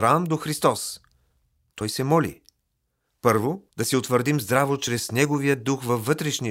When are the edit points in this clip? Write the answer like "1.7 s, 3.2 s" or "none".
1.7 s, 3.7 s